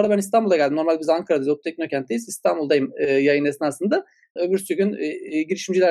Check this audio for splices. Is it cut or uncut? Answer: cut